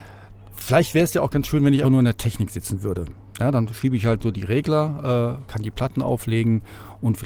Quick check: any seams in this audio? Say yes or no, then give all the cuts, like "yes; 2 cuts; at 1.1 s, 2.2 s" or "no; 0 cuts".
yes; 2 cuts; at 1.8 s, 5.5 s